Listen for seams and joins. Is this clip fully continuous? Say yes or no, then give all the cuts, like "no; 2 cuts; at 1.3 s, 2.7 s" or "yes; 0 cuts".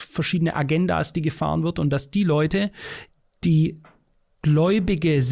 yes; 0 cuts